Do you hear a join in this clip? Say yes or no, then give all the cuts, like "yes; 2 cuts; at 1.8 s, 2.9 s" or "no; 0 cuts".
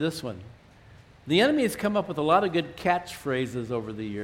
no; 0 cuts